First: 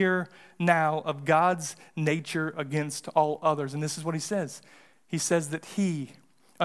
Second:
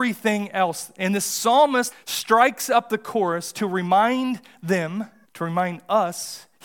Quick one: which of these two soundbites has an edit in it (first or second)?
second